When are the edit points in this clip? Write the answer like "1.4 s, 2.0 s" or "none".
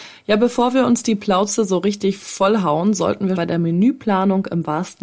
3.4 s